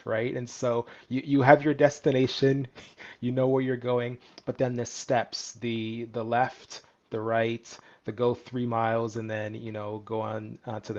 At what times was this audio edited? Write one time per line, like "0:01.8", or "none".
none